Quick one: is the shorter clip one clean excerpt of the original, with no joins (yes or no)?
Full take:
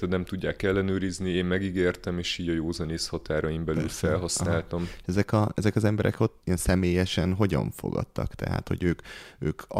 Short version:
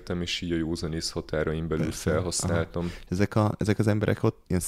yes